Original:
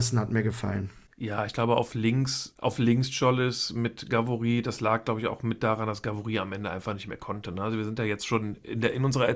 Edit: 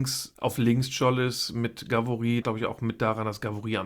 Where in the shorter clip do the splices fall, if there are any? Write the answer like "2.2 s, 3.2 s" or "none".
2.4 s